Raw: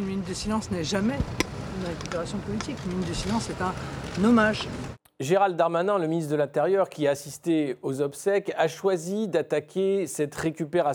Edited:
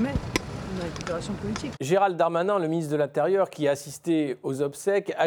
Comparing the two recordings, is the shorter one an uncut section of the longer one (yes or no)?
no